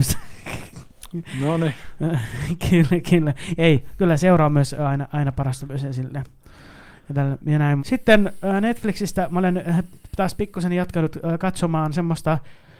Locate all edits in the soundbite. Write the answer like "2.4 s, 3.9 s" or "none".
7.8 s